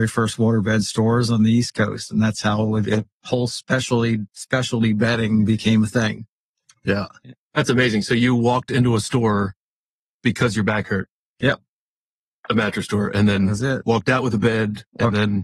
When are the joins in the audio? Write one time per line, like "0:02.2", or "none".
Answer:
0:04.3